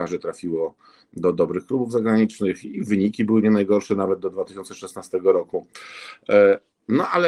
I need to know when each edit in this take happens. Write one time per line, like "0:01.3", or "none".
none